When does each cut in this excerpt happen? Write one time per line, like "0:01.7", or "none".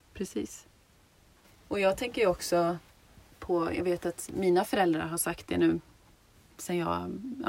none